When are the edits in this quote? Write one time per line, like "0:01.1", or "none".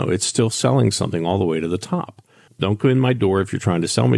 0:02.5